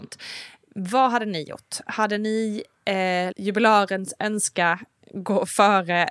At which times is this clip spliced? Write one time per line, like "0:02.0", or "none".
0:03.3

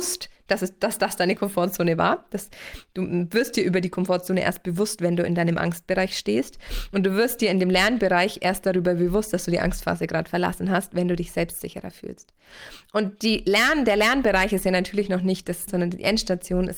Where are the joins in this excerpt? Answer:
0:15.7

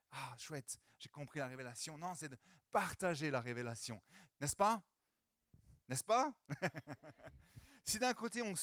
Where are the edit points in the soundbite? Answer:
0:04.3
0:05.8

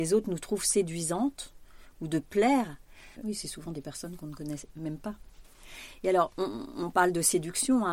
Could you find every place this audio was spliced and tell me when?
0:03.2

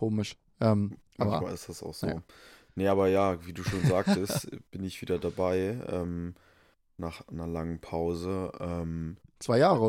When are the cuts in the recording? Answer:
none

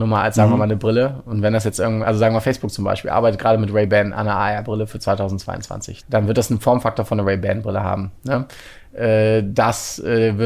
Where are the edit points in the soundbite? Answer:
0:06.0

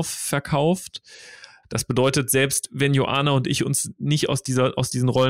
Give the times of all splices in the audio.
0:01.6

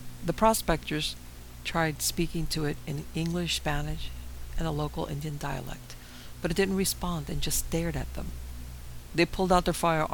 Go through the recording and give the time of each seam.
0:09.1

